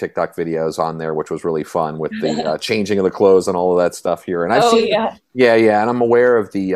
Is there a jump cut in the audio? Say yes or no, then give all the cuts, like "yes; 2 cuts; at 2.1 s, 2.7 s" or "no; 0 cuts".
no; 0 cuts